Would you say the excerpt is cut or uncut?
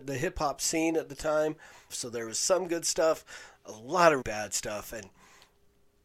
cut